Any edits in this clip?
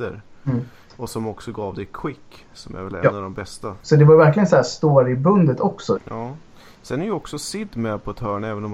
yes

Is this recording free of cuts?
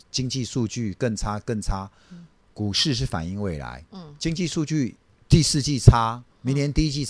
yes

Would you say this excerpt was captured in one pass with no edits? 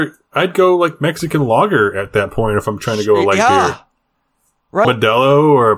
no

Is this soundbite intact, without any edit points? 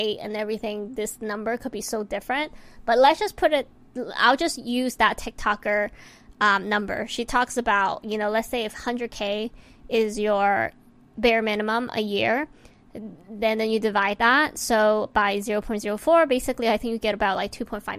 yes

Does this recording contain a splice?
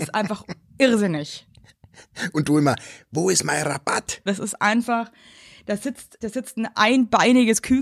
yes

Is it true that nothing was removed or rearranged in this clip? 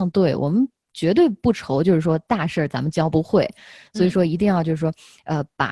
yes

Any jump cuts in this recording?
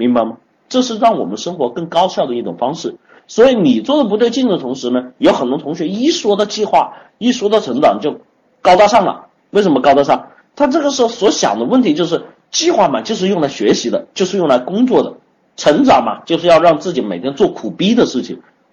no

